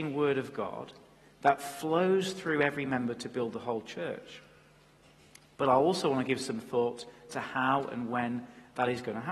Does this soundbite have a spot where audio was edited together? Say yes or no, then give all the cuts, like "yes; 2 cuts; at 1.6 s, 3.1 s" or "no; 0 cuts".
no; 0 cuts